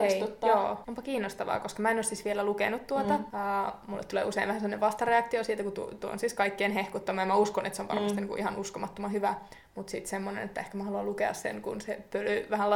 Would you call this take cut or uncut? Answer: uncut